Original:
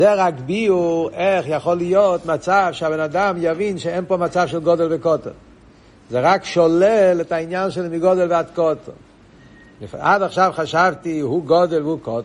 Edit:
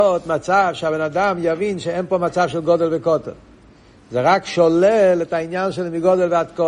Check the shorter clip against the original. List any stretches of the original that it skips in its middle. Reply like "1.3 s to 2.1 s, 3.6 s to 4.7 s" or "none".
none